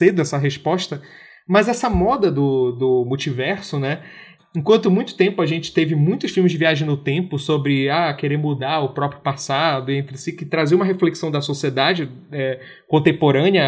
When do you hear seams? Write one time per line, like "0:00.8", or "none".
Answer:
0:04.4